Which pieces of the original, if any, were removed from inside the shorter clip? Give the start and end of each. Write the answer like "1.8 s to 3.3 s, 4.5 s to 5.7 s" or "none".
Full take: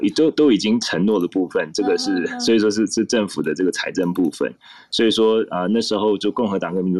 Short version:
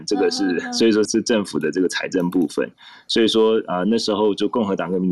2.7 s to 2.9 s